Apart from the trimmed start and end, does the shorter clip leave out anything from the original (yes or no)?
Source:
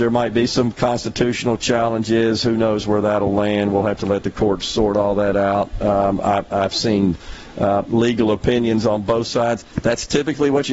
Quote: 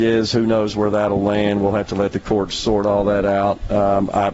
no